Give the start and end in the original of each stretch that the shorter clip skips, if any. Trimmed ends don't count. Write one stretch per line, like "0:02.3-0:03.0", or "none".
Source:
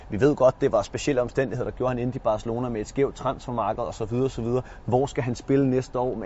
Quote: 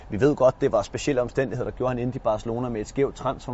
none